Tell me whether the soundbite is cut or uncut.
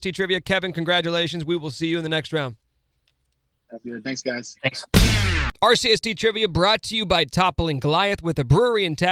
uncut